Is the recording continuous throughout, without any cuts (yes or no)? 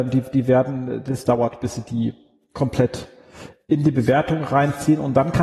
yes